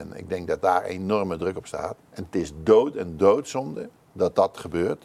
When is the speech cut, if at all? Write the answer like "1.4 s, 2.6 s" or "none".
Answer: 2.0 s